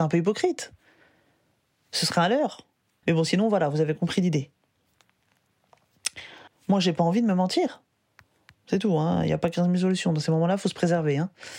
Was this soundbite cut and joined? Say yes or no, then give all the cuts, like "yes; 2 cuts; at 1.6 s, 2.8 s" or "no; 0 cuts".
yes; 3 cuts; at 3.0 s, 6.5 s, 8.5 s